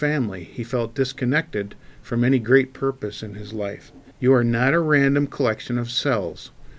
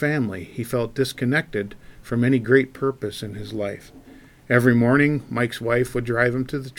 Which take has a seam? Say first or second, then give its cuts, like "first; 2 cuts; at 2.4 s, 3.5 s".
first; 1 cut; at 4.1 s